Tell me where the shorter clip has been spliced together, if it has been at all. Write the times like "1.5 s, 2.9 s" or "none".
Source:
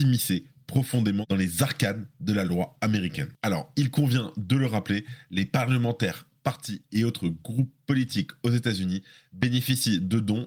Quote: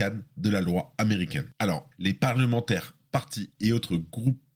1.9 s